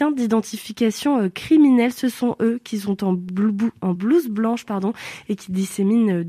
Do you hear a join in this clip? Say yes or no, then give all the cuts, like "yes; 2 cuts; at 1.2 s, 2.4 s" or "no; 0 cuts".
no; 0 cuts